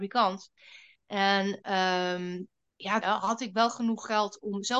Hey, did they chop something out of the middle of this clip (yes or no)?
yes